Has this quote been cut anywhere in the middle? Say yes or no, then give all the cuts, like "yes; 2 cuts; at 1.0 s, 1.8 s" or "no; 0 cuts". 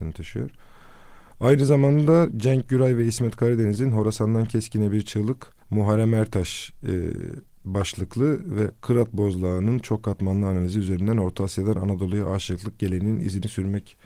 yes; 1 cut; at 5.6 s